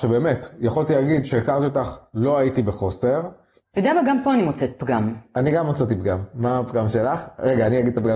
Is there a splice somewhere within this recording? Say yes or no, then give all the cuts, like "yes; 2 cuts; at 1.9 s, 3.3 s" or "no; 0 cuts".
no; 0 cuts